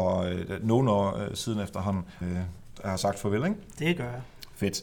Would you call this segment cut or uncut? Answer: cut